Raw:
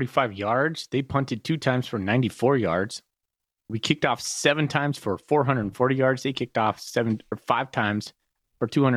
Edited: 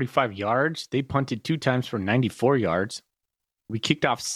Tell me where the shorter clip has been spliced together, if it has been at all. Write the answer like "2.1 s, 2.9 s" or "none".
none